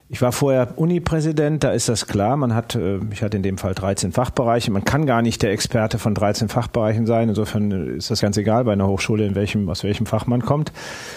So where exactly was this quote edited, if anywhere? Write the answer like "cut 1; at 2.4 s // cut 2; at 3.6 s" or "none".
cut 1; at 8.2 s